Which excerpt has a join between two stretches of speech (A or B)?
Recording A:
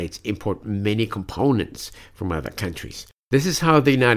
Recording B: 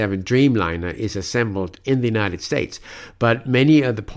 A